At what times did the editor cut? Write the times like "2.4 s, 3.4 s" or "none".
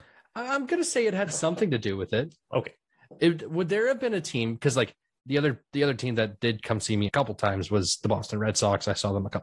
7.1 s